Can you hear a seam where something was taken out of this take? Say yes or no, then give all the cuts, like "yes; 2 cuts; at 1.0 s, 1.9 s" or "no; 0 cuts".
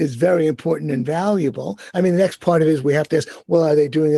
no; 0 cuts